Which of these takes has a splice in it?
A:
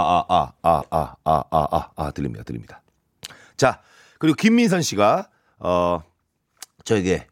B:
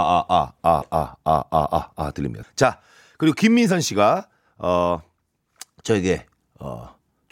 B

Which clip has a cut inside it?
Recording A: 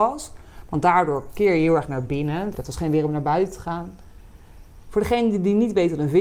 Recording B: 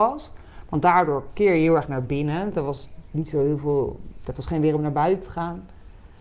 A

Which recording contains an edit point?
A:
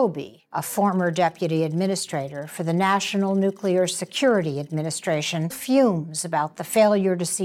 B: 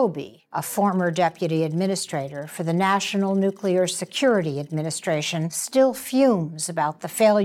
A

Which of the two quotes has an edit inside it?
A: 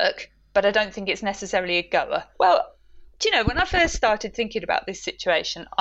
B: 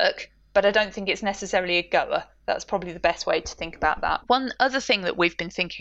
A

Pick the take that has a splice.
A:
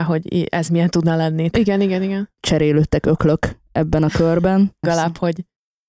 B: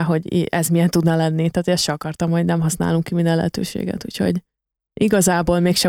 A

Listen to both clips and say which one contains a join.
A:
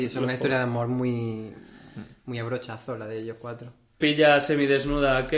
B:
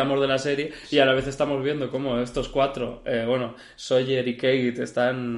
A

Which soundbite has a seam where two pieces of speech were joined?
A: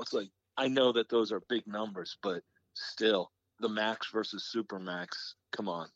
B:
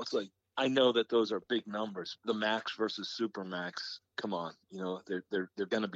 B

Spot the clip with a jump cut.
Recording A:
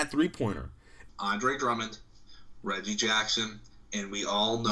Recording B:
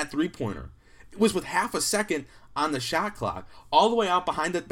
A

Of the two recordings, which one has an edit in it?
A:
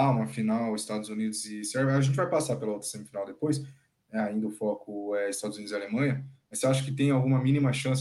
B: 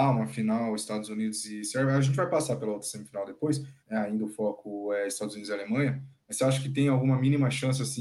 B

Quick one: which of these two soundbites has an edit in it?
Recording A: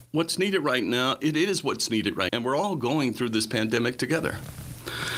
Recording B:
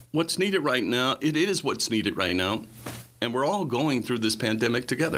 A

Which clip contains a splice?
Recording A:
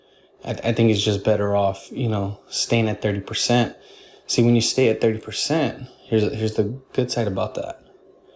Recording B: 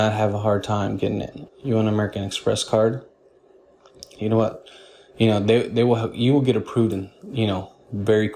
B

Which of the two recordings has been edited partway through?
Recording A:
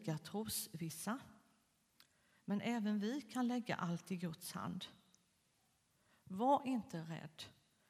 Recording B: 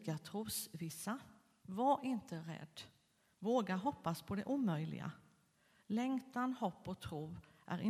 B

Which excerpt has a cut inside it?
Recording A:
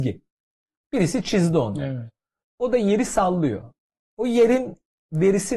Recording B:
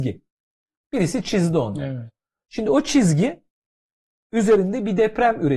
A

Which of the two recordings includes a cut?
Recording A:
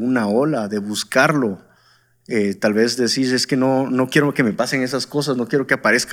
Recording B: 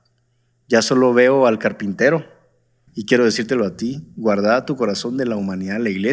B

